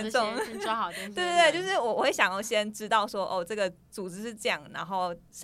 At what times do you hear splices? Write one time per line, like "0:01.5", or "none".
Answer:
none